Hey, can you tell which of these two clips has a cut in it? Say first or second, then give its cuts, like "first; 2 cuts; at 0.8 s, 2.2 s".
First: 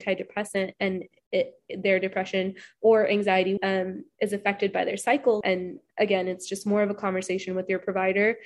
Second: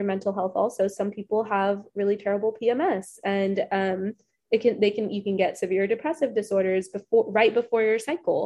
first; 2 cuts; at 3.6 s, 5.4 s